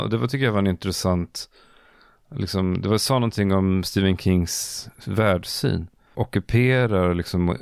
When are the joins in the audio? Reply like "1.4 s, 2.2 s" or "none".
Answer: 6.1 s